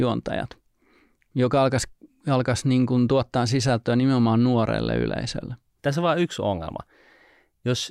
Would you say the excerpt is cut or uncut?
cut